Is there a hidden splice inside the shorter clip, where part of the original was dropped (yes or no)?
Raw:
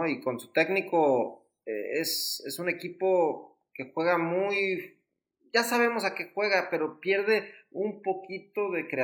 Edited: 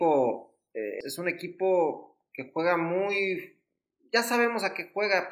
yes